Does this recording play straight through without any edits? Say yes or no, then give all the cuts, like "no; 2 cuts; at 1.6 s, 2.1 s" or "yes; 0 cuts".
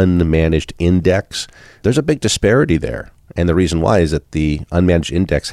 yes; 0 cuts